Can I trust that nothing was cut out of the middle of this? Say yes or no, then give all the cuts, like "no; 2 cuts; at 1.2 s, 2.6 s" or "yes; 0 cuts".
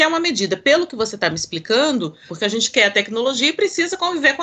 no; 1 cut; at 2.3 s